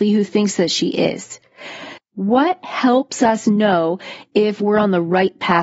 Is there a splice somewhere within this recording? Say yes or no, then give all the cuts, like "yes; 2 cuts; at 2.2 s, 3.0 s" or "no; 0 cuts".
yes; 1 cut; at 2.0 s